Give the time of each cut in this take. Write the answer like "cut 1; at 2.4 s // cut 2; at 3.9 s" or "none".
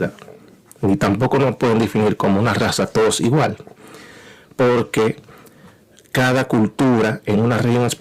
none